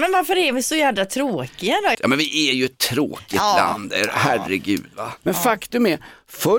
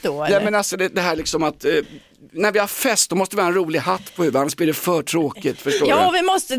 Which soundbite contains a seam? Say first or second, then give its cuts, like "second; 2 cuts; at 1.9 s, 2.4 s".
first; 2 cuts; at 1.9 s, 5.2 s